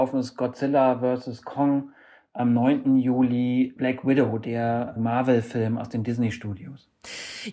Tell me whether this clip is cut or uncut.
uncut